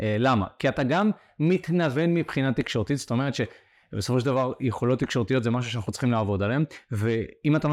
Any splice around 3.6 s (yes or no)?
no